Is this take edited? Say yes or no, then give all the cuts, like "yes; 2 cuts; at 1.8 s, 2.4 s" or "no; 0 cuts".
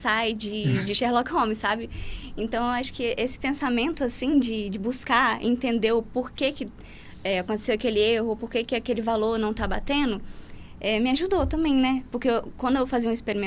no; 0 cuts